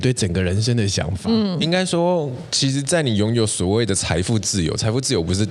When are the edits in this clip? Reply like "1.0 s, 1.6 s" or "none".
none

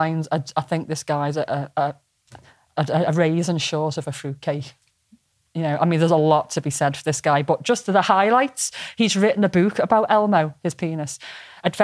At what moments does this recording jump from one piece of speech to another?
none

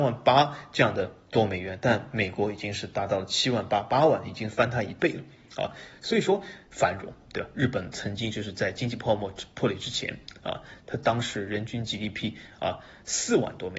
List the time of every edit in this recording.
6.7 s, 10.9 s

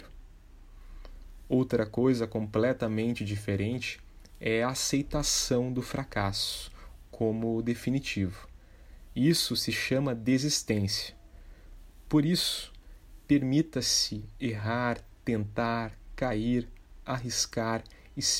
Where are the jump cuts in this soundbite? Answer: none

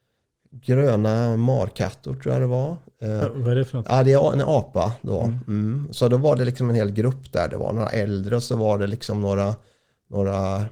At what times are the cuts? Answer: 3.2 s

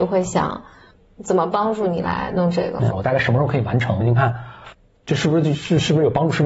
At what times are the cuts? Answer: 2.9 s, 4.0 s

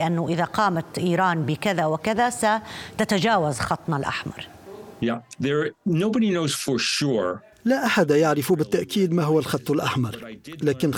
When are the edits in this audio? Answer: none

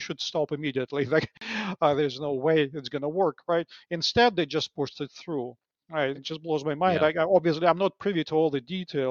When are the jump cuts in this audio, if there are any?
6.2 s

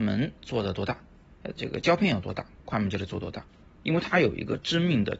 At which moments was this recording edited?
3.8 s

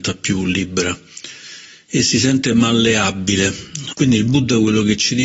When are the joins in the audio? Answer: 3.9 s

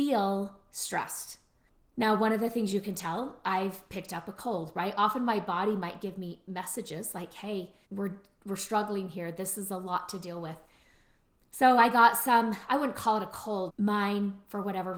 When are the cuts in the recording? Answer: 7.8 s, 13.7 s

